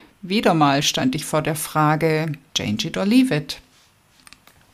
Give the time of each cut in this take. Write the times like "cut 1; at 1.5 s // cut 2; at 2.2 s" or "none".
cut 1; at 2.5 s